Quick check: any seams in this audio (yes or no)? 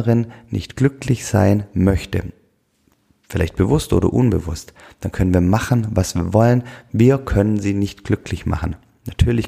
no